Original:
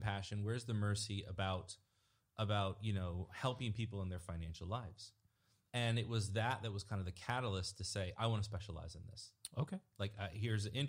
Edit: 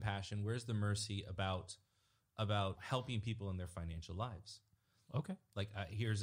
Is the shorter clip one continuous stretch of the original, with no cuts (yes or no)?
no